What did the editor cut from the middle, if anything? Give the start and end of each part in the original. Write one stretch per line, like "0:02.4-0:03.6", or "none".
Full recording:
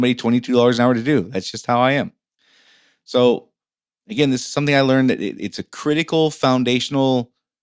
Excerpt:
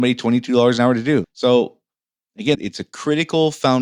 0:01.2-0:03.0
0:04.3-0:05.3